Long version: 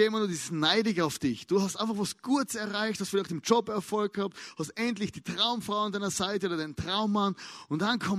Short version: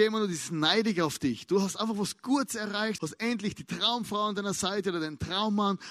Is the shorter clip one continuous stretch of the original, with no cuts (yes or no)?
no